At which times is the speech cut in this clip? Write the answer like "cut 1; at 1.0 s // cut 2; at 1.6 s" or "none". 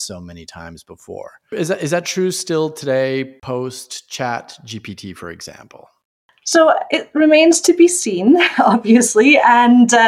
cut 1; at 1.5 s